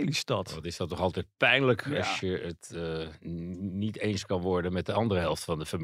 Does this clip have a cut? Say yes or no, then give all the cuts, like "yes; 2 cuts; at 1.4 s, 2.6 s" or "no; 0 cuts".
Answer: no; 0 cuts